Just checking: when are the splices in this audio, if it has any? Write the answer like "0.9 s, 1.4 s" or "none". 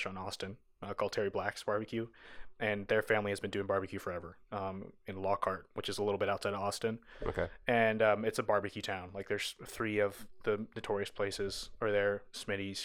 none

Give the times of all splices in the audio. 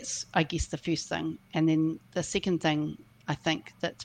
none

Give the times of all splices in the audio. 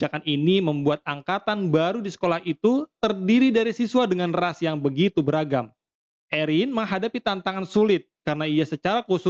none

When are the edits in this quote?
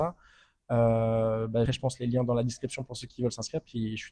1.7 s

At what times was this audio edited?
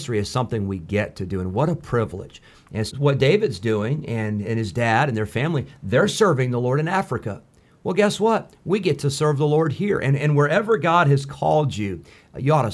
2.9 s

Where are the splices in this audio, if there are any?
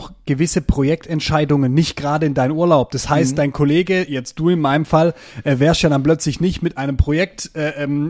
none

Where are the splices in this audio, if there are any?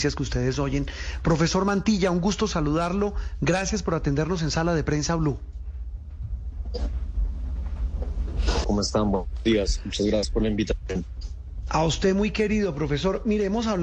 8.6 s

